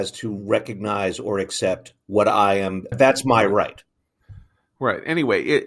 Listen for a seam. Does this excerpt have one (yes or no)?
yes